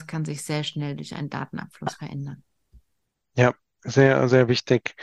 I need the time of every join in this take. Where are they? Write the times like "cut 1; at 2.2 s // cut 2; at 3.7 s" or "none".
none